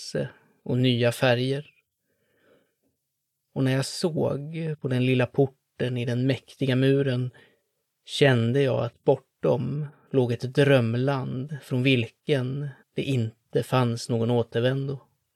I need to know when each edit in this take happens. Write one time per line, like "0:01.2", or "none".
0:12.8